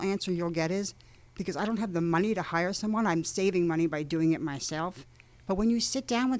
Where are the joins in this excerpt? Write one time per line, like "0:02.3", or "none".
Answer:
none